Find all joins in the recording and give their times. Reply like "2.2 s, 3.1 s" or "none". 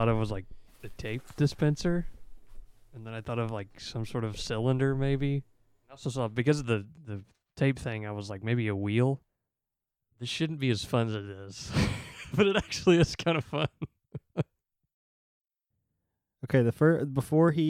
none